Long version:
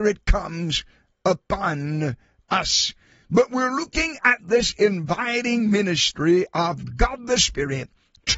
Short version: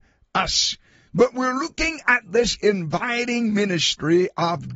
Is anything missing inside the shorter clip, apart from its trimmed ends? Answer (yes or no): no